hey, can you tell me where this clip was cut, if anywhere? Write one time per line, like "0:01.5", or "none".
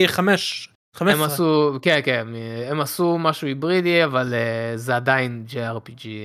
none